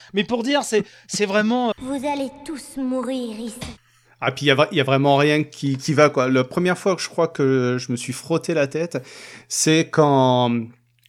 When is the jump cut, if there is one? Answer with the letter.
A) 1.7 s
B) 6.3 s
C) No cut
A